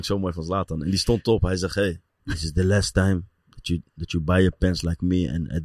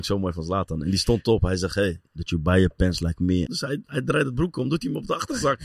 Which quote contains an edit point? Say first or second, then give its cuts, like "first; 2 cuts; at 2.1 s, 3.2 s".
second; 2 cuts; at 2.0 s, 3.5 s